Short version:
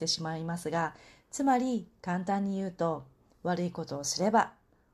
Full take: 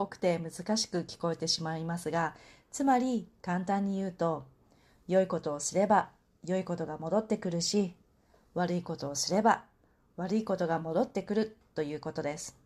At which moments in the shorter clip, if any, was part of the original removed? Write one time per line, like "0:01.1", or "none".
0:03.3